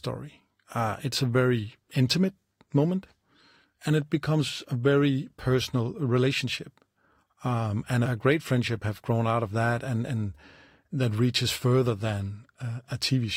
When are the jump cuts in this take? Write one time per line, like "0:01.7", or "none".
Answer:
0:08.0